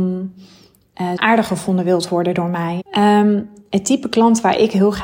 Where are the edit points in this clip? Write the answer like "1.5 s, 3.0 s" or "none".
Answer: 1.2 s, 2.8 s